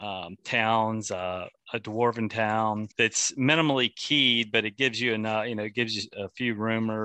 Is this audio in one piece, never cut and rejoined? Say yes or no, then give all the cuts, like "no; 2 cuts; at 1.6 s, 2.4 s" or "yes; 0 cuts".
no; 1 cut; at 2.9 s